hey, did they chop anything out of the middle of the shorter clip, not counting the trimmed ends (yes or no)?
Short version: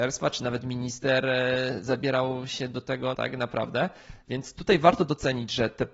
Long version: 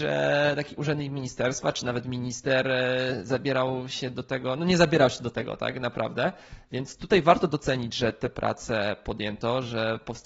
yes